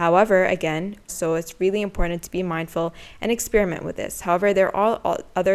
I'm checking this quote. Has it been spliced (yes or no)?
yes